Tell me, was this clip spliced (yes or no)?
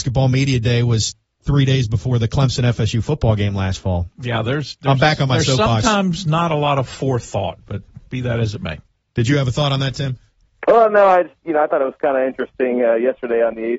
no